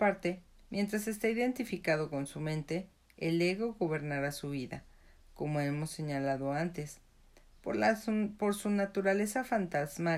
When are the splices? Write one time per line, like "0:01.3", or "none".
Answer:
none